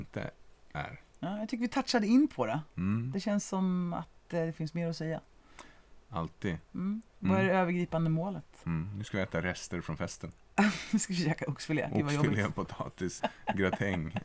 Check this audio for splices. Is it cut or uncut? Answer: cut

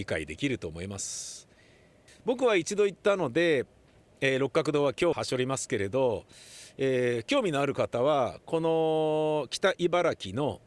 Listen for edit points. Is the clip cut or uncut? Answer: cut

